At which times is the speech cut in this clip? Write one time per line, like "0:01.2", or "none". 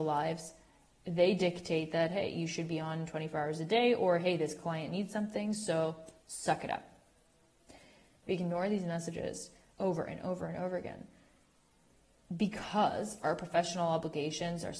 0:08.2